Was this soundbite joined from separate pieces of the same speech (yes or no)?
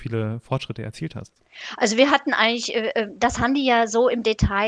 no